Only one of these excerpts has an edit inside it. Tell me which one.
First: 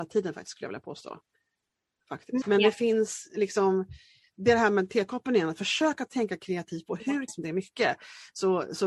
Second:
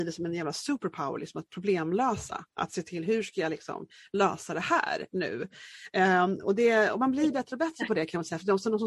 first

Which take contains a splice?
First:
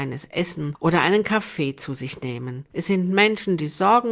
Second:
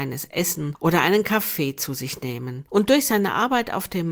second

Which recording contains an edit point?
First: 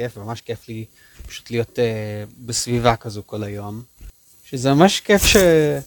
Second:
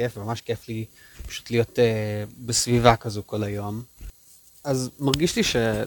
first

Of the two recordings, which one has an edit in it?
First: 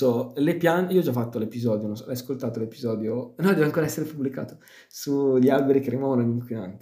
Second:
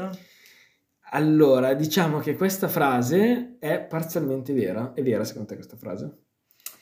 second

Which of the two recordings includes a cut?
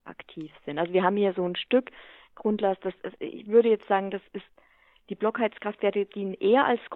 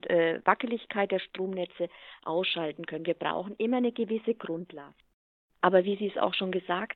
second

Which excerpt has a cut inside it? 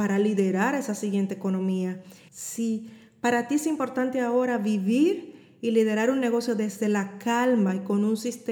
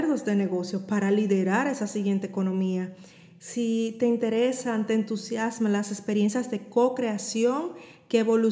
first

